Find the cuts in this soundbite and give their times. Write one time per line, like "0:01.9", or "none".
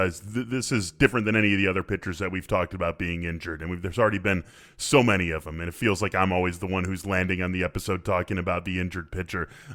none